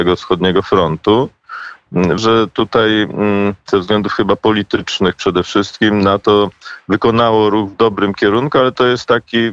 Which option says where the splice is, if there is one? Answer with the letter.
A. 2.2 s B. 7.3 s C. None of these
A